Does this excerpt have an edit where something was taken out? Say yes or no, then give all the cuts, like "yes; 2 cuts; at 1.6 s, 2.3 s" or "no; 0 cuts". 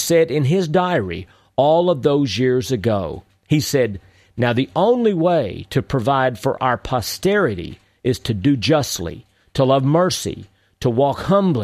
no; 0 cuts